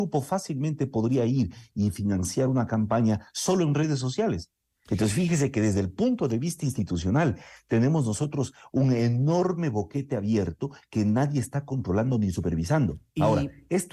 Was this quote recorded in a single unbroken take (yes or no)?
no